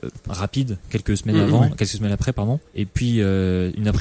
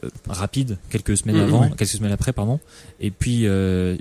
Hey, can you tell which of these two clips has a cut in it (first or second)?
first